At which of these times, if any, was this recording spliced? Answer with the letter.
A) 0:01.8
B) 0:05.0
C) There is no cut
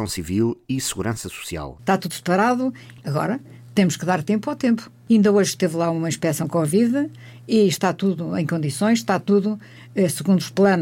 A